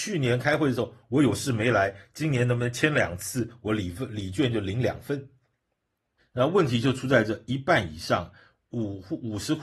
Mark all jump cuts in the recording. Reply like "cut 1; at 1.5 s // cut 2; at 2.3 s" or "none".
cut 1; at 6.2 s